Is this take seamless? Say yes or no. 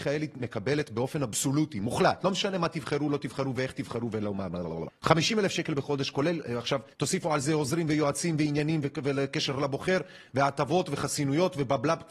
no